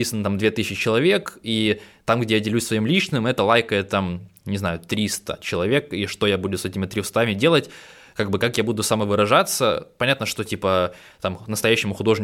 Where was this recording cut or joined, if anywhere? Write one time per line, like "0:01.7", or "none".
none